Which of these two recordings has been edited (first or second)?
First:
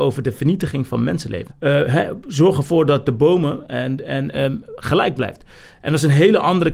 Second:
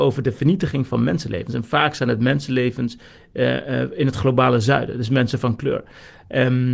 first